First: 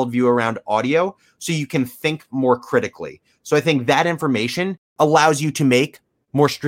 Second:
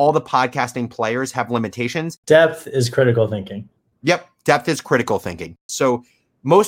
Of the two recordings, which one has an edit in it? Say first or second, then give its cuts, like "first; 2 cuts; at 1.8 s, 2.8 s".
second; 2 cuts; at 2.2 s, 5.7 s